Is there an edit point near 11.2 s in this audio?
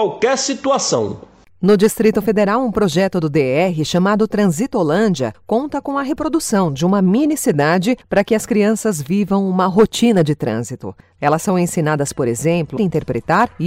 yes; 2 cuts; at 11.2 s, 12.8 s

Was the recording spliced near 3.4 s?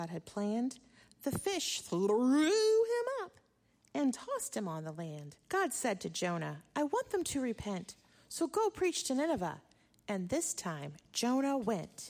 no; 1 cut; at 5.4 s

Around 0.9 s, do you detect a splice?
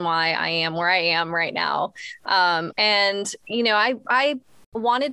no; 1 cut; at 2.7 s

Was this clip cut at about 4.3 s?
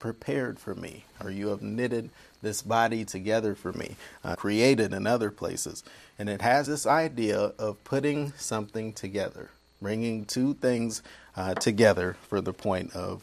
yes; 2 cuts; at 4.3 s, 6.6 s

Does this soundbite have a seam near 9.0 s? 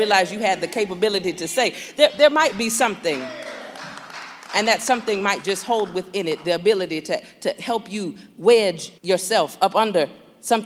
yes; 1 cut; at 9.0 s

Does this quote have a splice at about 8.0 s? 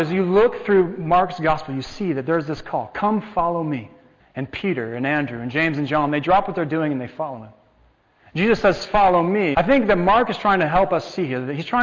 no; 2 cuts; at 4.2 s, 9.5 s

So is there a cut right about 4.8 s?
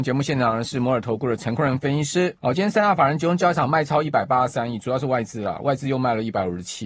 no; 1 cut; at 2.4 s

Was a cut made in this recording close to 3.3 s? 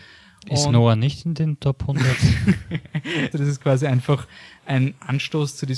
yes; 1 cut; at 3.3 s

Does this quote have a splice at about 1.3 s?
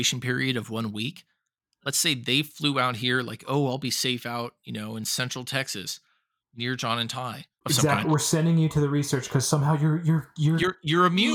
no; 1 cut; at 7.6 s

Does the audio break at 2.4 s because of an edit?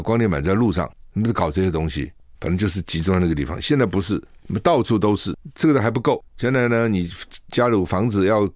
yes; 1 cut; at 2.4 s

